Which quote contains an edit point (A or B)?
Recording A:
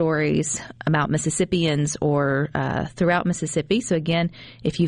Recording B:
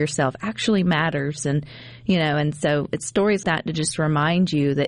B